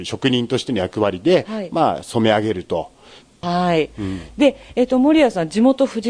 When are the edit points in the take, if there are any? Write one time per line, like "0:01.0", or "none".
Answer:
0:03.4